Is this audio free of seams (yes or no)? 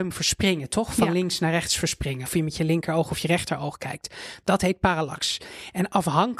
no